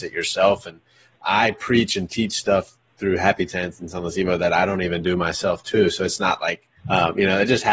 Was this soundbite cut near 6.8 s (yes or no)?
yes